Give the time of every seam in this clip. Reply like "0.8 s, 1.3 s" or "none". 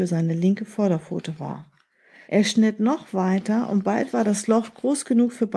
2.3 s